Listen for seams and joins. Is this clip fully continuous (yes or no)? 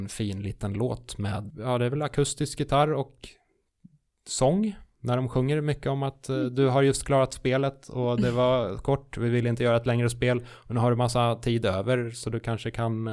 no